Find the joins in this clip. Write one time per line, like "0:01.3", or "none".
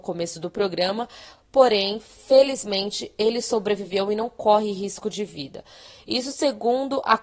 none